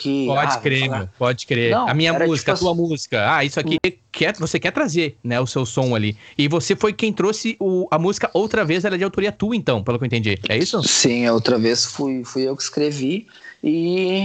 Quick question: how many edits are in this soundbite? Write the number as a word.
one